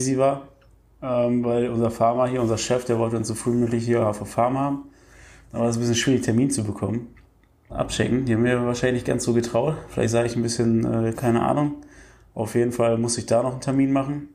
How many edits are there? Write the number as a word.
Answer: two